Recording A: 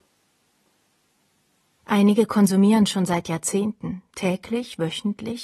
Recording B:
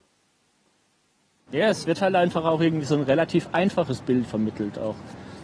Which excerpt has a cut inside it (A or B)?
B